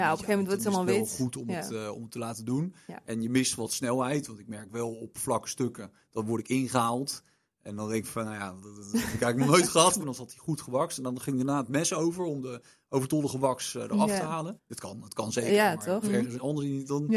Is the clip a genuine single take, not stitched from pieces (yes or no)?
no